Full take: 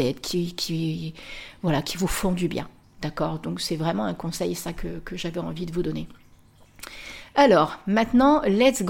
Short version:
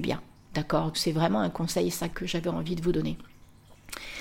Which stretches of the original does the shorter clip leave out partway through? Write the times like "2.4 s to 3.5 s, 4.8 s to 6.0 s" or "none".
3.4 s to 3.6 s, 4.7 s to 5.0 s